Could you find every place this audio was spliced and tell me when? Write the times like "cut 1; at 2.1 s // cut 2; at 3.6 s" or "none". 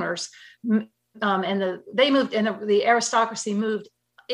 none